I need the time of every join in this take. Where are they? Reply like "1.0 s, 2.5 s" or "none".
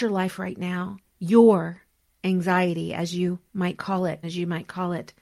4.2 s